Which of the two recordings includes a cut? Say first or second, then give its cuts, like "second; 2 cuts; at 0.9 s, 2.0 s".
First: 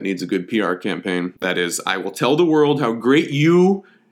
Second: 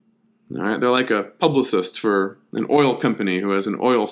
first; 1 cut; at 1.3 s